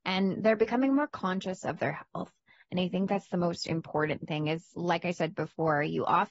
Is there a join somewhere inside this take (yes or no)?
no